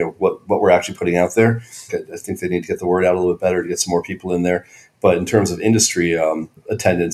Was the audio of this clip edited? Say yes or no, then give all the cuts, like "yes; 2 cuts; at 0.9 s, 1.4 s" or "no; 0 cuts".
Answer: yes; 1 cut; at 1.9 s